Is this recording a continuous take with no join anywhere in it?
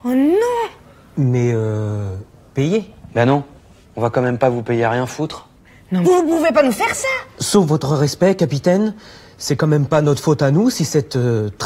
no; 1 cut; at 6.0 s

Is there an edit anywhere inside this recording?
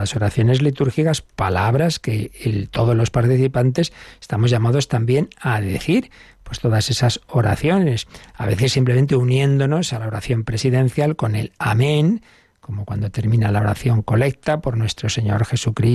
no; 0 cuts

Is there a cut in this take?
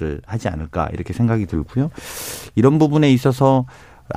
no; 0 cuts

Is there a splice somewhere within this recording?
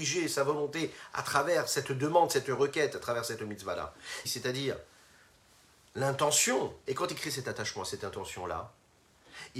yes; 2 cuts; at 4.2 s, 6.9 s

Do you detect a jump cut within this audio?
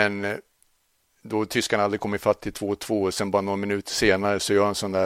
no; 0 cuts

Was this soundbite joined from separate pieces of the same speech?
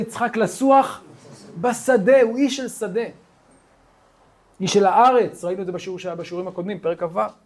no; 0 cuts

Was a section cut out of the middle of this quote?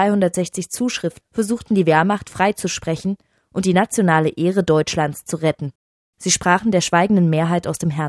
yes; 1 cut; at 1.2 s

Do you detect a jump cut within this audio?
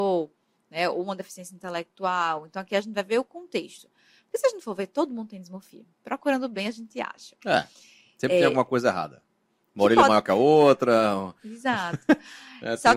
no; 0 cuts

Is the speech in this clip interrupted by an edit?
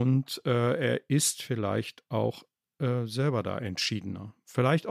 no; 0 cuts

